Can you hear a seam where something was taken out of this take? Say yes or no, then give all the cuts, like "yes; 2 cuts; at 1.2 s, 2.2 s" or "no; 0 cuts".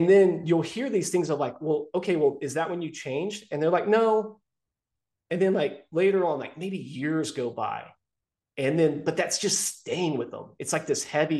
no; 0 cuts